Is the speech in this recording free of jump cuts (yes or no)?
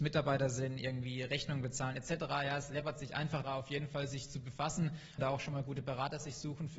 no